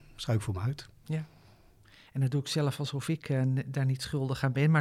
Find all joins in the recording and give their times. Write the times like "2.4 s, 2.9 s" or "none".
none